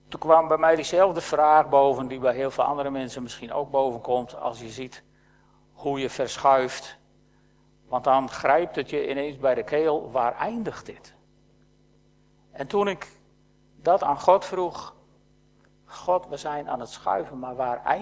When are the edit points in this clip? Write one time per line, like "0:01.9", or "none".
none